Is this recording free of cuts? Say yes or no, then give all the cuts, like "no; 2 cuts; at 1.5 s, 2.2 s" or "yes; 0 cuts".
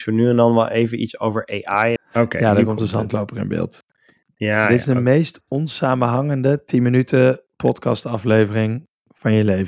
no; 1 cut; at 2.0 s